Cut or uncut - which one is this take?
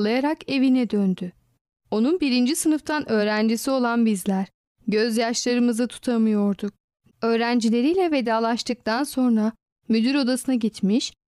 cut